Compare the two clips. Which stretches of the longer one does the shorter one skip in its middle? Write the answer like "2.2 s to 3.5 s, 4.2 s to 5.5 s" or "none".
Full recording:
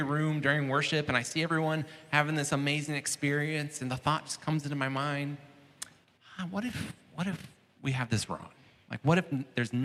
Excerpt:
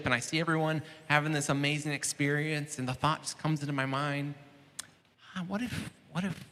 none